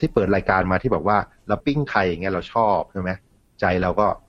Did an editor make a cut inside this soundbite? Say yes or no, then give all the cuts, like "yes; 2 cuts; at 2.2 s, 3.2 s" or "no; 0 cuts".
yes; 1 cut; at 1.6 s